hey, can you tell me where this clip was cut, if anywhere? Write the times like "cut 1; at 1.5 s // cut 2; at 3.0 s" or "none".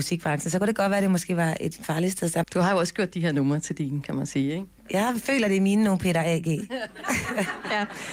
cut 1; at 2.4 s